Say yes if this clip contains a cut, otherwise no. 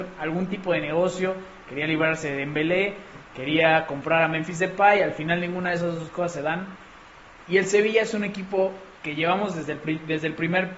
no